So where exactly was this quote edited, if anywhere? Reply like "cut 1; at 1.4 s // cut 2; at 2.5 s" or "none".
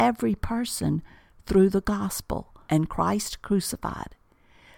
cut 1; at 2.7 s